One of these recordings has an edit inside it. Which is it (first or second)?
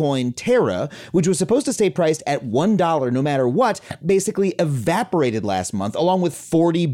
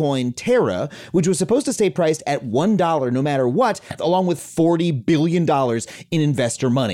second